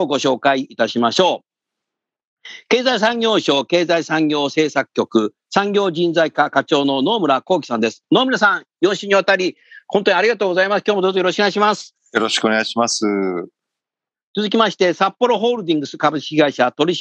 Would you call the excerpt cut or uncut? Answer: uncut